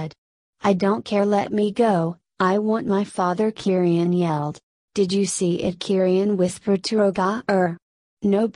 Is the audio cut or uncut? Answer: cut